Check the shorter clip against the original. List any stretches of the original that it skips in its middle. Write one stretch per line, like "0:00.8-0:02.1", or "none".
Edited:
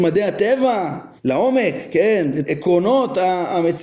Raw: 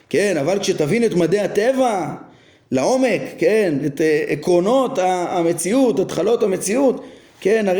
0:02.3-0:02.6
0:03.9-0:04.3